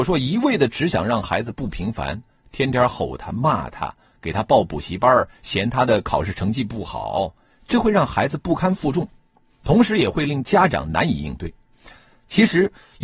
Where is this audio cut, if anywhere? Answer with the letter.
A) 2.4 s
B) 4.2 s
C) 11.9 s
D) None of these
D